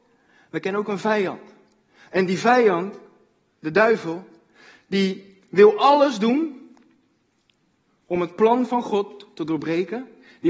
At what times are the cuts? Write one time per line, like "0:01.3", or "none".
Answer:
none